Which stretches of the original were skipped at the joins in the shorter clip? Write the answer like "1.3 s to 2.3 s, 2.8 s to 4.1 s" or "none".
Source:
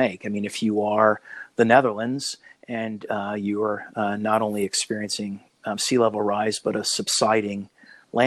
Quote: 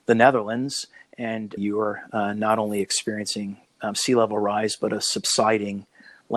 3.1 s to 3.4 s